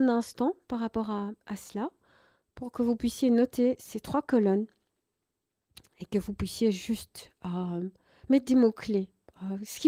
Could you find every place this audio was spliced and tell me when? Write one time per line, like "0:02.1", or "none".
none